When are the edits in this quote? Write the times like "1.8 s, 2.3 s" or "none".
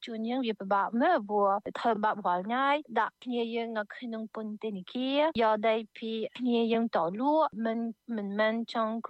none

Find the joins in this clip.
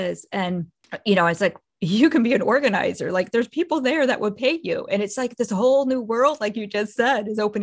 none

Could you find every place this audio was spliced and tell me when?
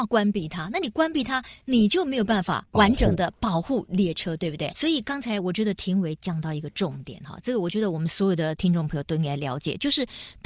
4.7 s

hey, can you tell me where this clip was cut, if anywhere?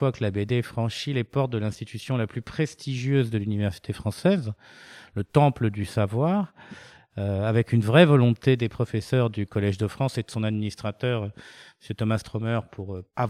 none

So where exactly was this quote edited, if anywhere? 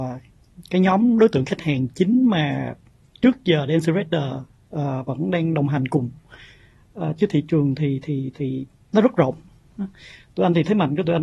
none

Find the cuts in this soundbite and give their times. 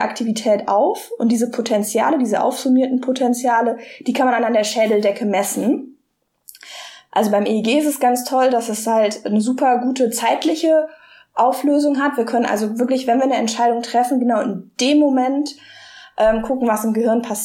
none

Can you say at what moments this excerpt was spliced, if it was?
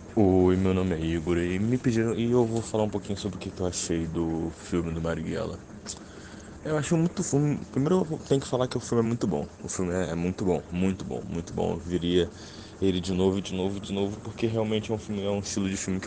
none

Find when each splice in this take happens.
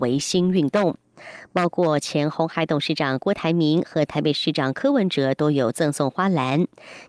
none

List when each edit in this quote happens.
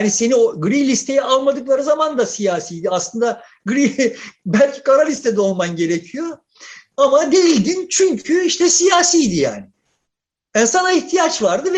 none

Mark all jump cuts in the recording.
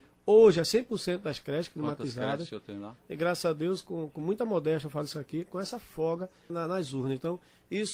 3.0 s, 6.5 s

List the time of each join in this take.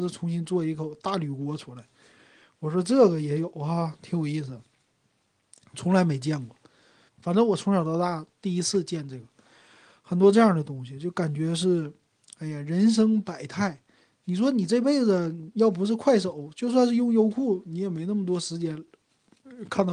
7.1 s

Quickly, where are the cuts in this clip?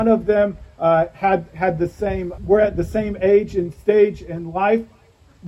2.4 s

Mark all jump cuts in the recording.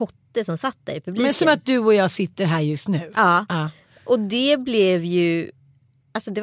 none

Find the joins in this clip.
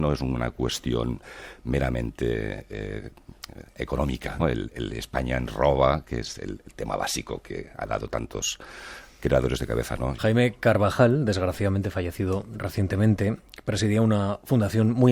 4.4 s, 10.2 s

